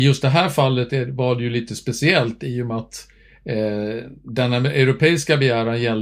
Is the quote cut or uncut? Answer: uncut